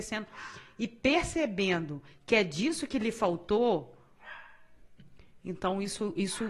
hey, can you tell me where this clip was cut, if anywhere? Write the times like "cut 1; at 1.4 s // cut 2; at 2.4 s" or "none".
none